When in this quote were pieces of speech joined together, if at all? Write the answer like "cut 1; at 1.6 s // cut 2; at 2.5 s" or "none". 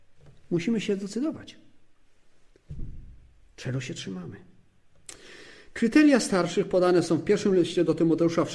none